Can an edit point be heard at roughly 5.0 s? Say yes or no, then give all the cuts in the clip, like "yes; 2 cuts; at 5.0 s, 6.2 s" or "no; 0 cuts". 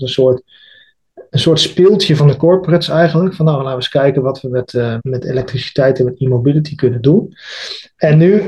yes; 2 cuts; at 1.3 s, 5.0 s